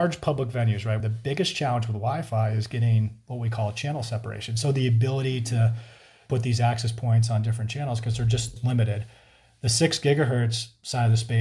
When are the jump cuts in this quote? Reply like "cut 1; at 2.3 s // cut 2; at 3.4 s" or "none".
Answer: cut 1; at 1.0 s